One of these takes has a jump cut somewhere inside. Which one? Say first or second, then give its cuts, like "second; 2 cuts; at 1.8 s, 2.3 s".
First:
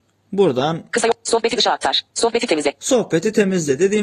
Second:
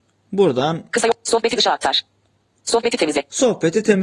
first; 1 cut; at 2.1 s